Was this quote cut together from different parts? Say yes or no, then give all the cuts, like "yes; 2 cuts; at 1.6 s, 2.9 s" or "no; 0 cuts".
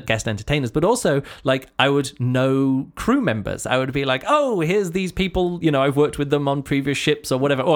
no; 0 cuts